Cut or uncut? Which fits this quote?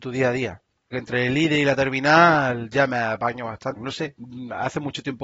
cut